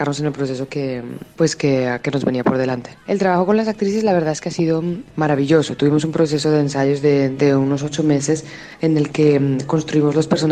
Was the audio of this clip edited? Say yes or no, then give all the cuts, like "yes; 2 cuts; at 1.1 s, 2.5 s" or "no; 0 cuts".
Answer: no; 0 cuts